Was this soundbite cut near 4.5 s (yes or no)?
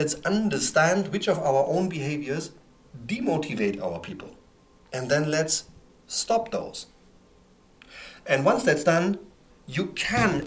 no